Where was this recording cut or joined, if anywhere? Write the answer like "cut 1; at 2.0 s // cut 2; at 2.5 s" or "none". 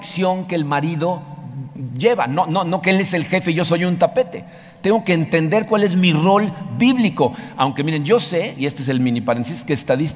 none